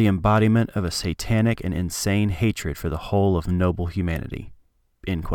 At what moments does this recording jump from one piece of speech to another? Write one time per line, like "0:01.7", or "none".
none